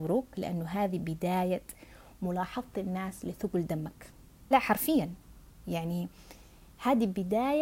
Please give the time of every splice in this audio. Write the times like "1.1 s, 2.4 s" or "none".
4.5 s